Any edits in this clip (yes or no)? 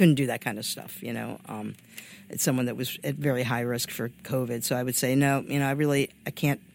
no